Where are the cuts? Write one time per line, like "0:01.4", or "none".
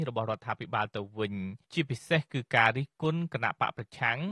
0:01.6